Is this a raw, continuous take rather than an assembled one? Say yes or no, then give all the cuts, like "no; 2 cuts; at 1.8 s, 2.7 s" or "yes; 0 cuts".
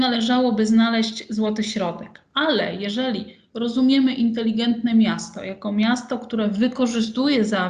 yes; 0 cuts